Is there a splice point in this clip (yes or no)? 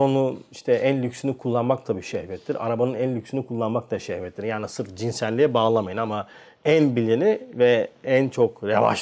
no